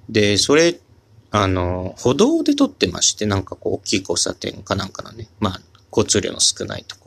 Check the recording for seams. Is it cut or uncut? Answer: uncut